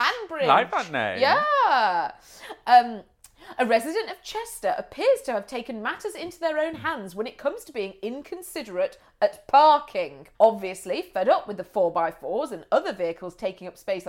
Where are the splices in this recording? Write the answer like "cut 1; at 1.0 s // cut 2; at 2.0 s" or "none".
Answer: cut 1; at 10.3 s